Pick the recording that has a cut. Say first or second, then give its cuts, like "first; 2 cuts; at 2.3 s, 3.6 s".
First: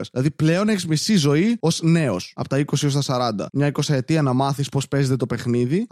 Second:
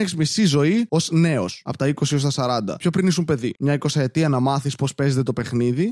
first; 1 cut; at 3.5 s